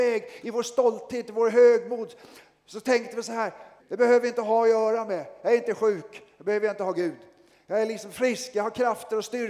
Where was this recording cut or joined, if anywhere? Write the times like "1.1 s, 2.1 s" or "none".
3.8 s